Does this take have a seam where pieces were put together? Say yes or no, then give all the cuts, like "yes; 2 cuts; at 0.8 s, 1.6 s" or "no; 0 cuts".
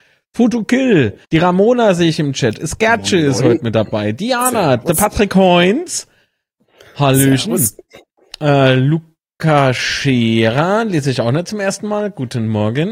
yes; 1 cut; at 1.2 s